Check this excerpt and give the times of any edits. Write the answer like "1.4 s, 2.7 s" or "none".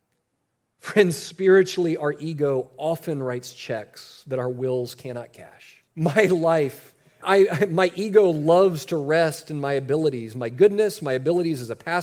5.9 s, 7.2 s